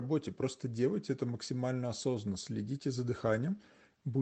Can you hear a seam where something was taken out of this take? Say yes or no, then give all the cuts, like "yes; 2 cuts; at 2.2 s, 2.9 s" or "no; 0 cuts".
no; 0 cuts